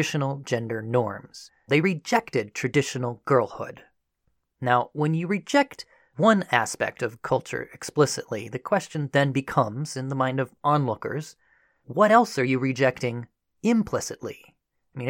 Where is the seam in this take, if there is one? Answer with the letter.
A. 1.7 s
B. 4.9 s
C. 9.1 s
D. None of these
A